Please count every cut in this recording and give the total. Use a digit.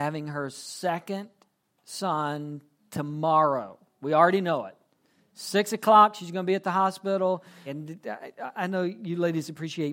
1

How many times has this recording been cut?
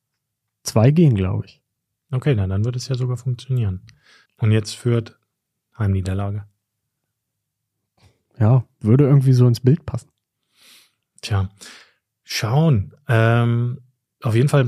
1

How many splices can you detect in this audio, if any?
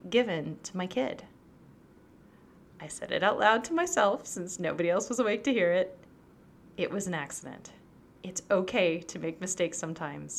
0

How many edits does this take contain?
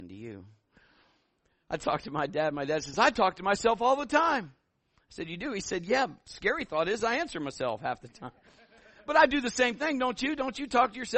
0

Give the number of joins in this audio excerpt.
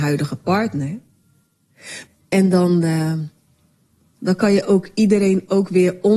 2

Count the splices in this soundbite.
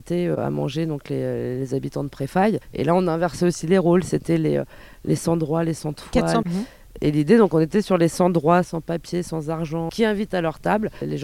3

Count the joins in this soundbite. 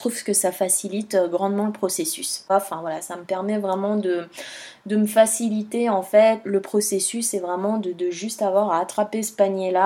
2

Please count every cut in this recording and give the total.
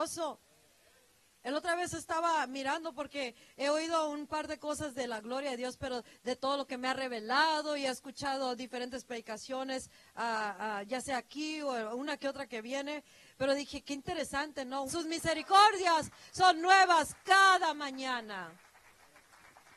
1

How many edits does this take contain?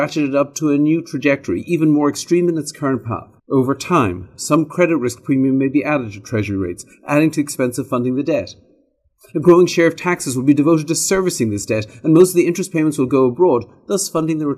1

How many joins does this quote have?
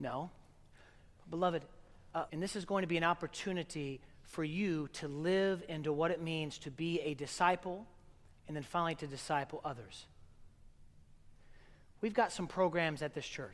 1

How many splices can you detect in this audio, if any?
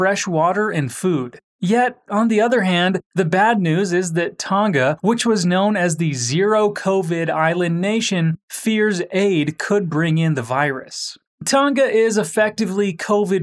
1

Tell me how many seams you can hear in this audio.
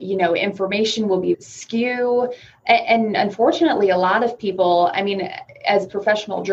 1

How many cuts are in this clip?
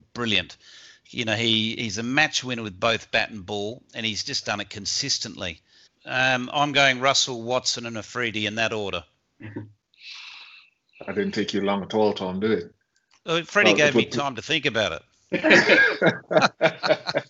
1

